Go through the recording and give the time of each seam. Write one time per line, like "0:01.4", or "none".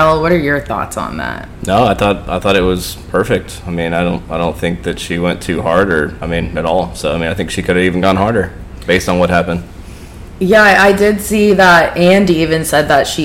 none